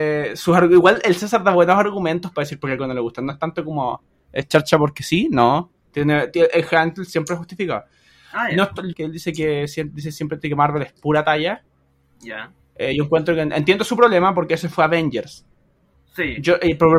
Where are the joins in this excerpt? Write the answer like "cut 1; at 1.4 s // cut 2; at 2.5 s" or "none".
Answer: cut 1; at 8.9 s